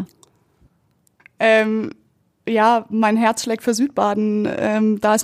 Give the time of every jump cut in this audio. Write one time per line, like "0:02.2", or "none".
0:01.2

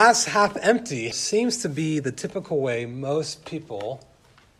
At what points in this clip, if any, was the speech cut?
0:01.1

